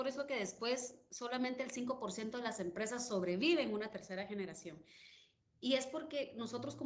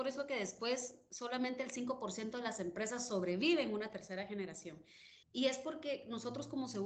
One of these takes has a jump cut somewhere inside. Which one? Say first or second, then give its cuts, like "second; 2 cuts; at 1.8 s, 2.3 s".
second; 1 cut; at 5.2 s